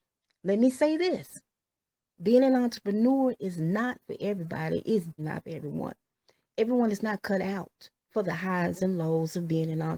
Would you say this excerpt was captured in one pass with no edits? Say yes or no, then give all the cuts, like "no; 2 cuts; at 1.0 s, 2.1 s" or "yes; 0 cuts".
no; 2 cuts; at 5.2 s, 8.0 s